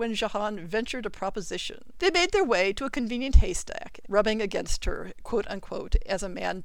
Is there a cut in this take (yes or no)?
yes